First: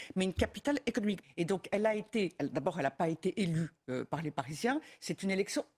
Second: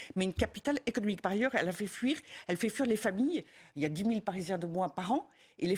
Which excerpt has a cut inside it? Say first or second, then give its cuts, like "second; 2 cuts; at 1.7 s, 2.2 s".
first; 1 cut; at 1.2 s